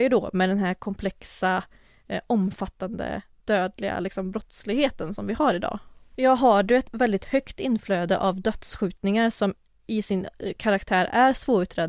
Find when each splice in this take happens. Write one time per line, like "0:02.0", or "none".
0:06.1